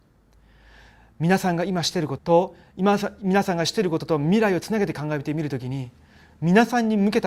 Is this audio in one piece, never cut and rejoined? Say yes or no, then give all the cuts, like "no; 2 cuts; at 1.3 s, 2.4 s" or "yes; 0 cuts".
no; 1 cut; at 2.2 s